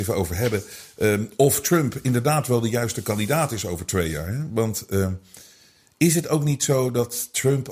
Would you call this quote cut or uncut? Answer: uncut